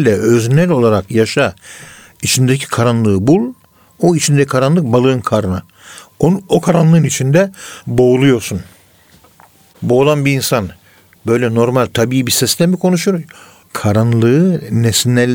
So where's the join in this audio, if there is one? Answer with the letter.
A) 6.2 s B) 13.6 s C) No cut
B